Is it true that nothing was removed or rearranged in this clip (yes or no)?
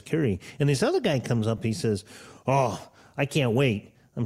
yes